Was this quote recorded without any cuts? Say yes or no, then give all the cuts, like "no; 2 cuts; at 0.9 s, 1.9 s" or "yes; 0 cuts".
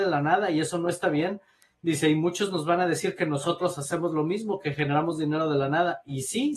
yes; 0 cuts